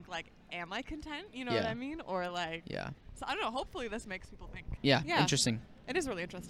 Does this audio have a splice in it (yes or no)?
yes